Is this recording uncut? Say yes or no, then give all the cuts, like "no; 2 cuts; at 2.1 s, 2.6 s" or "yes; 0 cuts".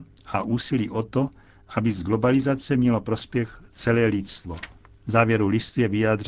no; 1 cut; at 4.8 s